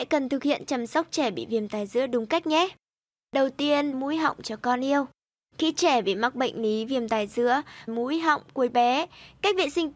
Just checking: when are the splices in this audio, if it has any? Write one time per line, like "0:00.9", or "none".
0:03.9
0:07.9